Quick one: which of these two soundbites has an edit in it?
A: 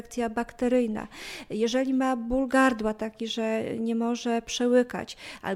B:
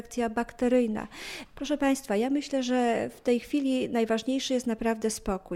B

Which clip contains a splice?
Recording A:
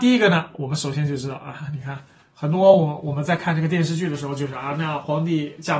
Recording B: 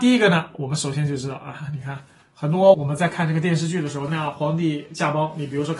B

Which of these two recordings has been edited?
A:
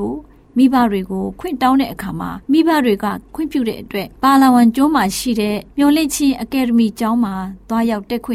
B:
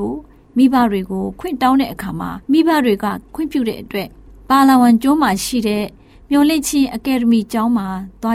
A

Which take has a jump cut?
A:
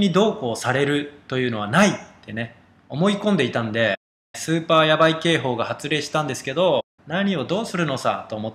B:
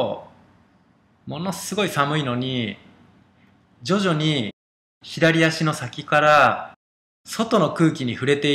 A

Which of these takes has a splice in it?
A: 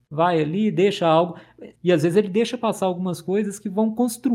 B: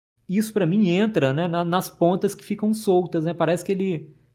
A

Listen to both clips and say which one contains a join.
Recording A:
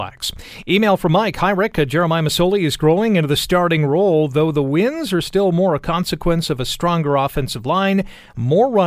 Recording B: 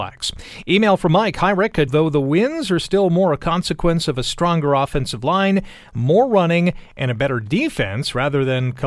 B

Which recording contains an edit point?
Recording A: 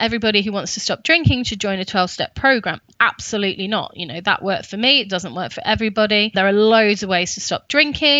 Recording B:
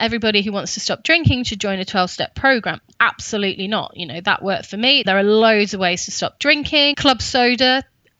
B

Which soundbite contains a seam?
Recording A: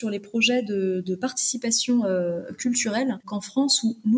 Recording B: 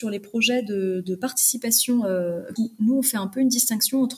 B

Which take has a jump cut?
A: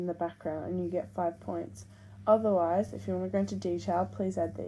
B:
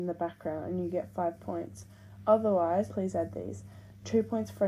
B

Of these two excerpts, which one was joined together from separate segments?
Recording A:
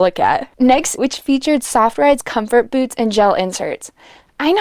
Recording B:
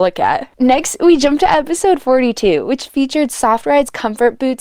A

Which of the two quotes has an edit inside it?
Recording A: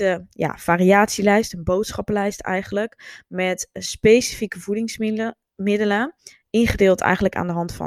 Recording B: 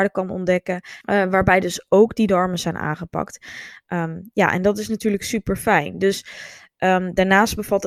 B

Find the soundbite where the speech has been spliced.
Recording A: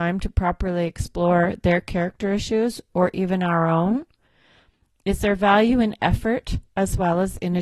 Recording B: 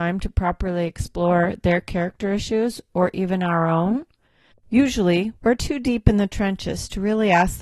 B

